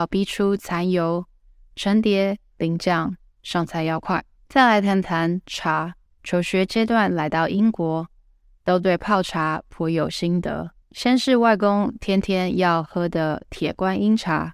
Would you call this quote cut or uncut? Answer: cut